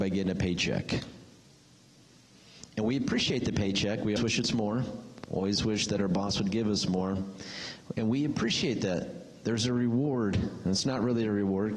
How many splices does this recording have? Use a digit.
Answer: 1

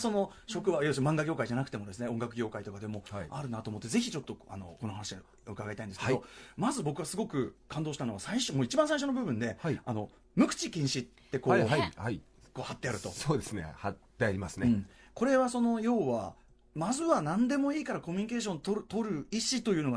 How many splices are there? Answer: 0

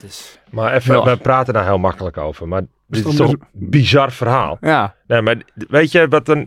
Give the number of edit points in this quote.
1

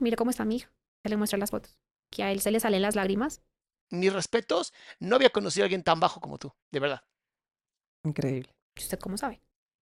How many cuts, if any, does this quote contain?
3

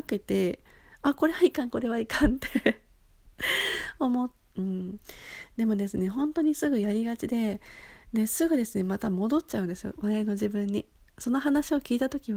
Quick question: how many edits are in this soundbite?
1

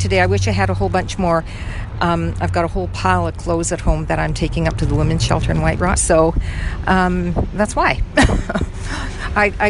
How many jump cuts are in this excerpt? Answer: 1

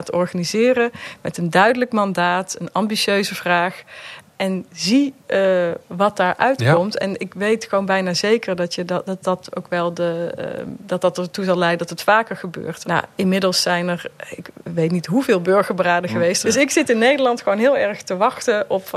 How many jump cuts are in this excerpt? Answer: 2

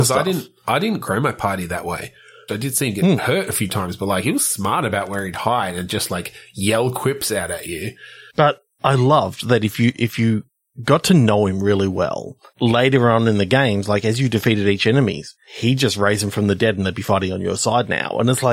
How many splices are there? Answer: 1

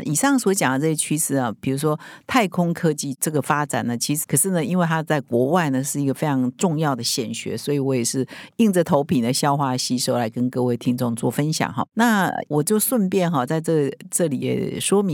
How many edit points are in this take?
1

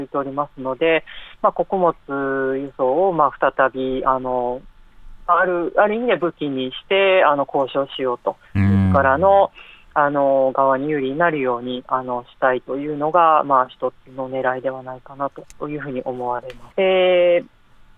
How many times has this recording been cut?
2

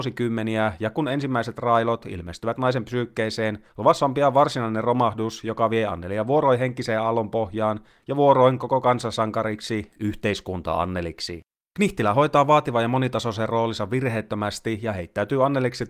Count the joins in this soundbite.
0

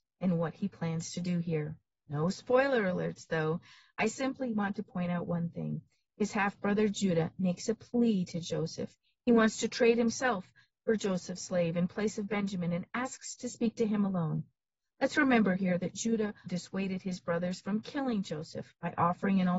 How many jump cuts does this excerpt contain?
1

